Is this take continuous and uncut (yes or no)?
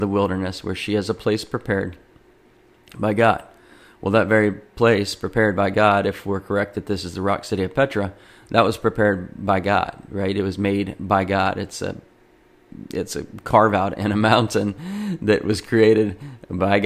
yes